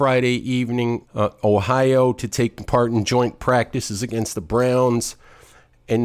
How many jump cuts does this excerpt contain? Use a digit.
1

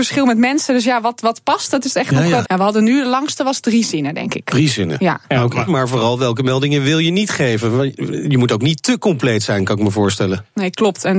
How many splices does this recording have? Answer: 2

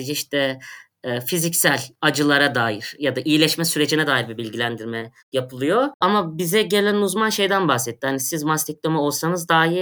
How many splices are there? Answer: 0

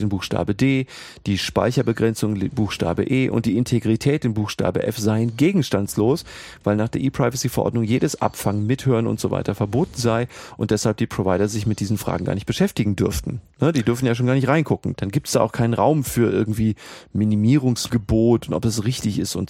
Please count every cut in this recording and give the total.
0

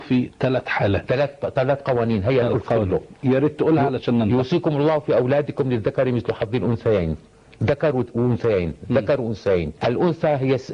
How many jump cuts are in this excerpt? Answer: 1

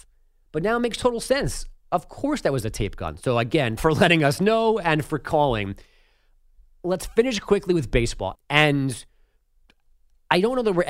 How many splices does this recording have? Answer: 2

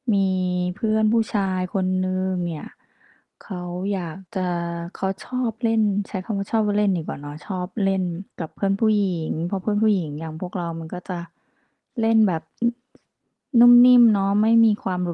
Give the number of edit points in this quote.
2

